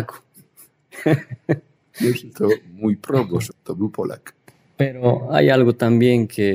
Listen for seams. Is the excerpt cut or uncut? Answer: cut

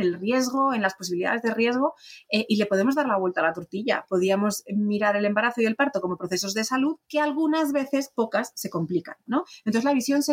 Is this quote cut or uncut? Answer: cut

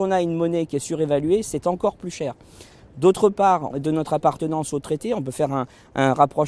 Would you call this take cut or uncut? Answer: cut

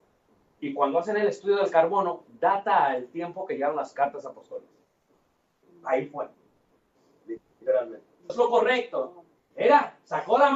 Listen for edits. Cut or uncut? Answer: cut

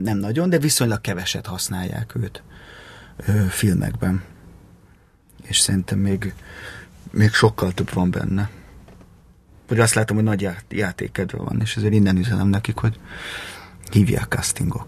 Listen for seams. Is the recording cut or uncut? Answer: uncut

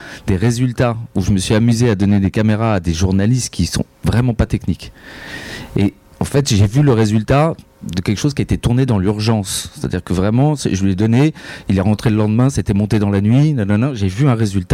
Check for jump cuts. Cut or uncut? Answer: uncut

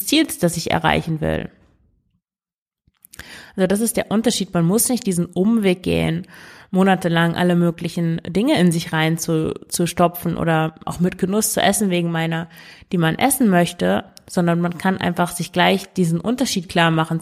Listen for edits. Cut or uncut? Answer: uncut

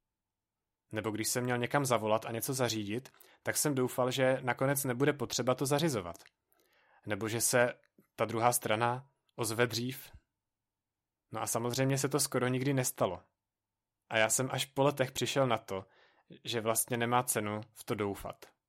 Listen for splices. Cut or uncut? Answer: uncut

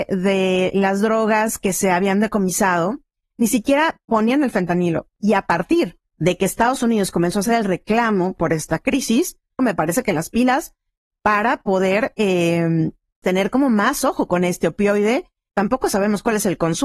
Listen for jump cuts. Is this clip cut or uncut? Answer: cut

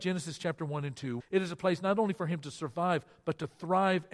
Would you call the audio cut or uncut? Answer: cut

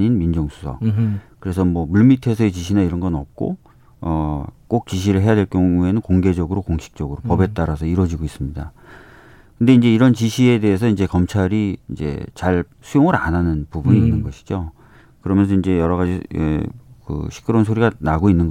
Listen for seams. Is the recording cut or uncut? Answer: cut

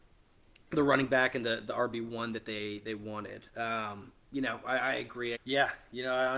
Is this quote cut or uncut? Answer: cut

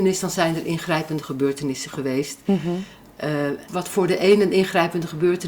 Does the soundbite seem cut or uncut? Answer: cut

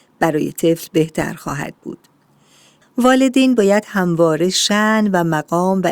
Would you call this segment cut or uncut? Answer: cut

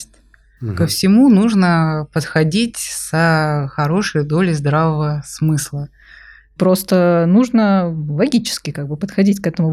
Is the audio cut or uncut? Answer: cut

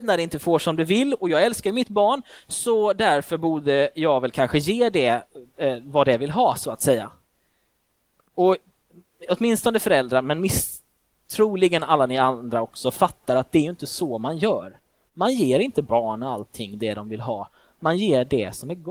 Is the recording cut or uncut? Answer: uncut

